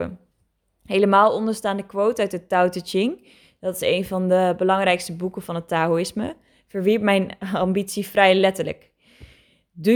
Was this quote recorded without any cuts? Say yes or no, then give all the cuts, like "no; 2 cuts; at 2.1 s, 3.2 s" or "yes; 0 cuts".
yes; 0 cuts